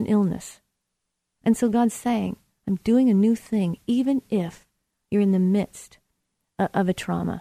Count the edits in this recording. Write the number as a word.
zero